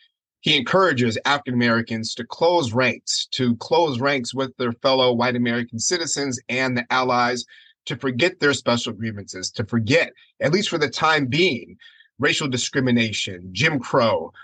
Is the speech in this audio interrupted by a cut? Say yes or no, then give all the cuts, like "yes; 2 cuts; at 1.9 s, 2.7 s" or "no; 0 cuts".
no; 0 cuts